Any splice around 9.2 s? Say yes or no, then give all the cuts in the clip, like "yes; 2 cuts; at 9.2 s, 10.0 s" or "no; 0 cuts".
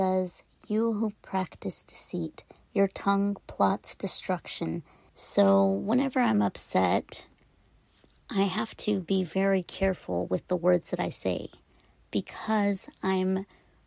no; 1 cut; at 5.1 s